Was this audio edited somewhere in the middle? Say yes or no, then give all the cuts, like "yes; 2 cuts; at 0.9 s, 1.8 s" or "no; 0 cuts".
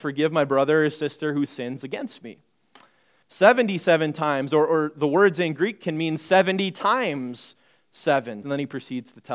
yes; 2 cuts; at 3.2 s, 8.4 s